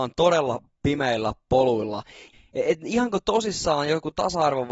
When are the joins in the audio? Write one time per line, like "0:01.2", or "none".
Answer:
0:02.3